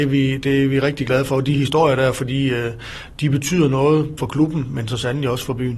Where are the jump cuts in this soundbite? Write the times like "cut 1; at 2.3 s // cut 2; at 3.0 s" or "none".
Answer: cut 1; at 4.2 s